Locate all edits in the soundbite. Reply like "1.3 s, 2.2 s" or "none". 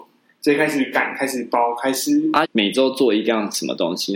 2.4 s